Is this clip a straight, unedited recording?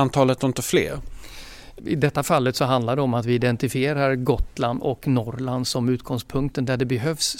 no; 1 cut; at 1.8 s

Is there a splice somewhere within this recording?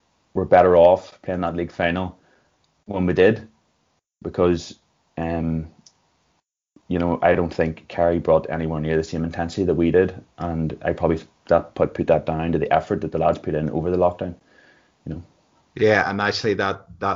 no; 0 cuts

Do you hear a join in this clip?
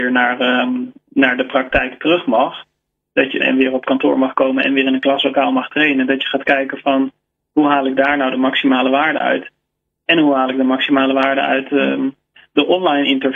yes; 1 cut; at 3.4 s

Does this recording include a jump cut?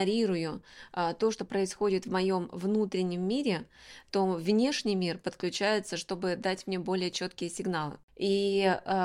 no; 0 cuts

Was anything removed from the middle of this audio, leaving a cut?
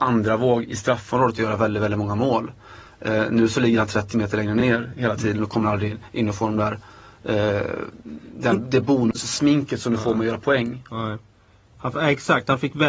no; 0 cuts

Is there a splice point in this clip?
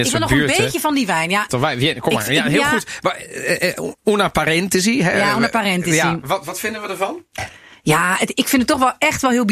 yes; 1 cut; at 1.5 s

